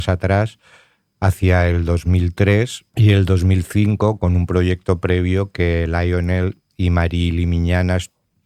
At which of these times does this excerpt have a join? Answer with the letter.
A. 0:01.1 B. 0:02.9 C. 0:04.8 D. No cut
B